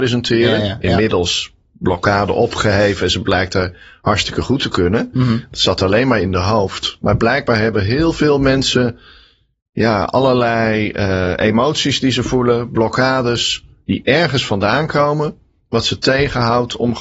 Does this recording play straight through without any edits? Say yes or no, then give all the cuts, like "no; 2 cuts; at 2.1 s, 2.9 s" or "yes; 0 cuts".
yes; 0 cuts